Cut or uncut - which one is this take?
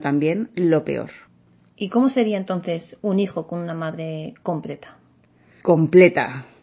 cut